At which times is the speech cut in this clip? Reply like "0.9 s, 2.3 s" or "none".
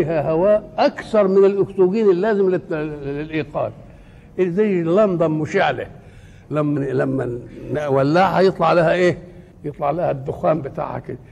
6.8 s, 9.5 s